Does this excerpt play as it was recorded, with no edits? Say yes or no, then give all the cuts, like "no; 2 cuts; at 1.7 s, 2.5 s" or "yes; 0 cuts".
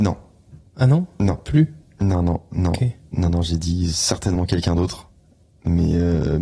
yes; 0 cuts